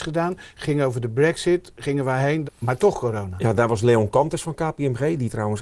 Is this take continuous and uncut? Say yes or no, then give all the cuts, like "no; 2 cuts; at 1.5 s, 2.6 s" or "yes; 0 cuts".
no; 1 cut; at 2.5 s